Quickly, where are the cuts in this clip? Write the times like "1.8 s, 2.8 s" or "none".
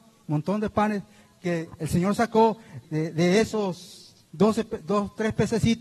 2.8 s, 4.2 s